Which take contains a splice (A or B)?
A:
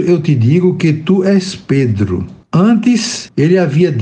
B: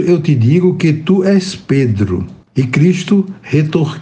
B